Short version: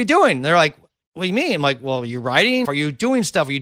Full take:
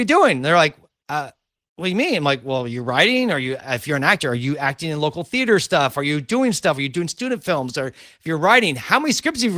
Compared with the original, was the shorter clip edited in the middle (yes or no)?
yes